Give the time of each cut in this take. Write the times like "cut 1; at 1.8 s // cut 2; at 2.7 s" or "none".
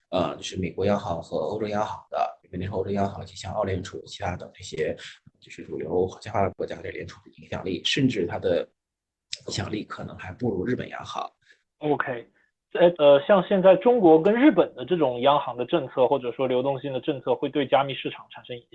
cut 1; at 11.6 s // cut 2; at 12.9 s